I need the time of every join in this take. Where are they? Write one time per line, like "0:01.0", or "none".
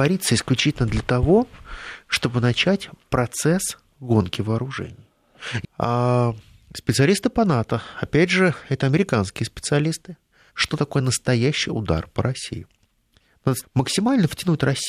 0:05.6
0:10.5
0:13.6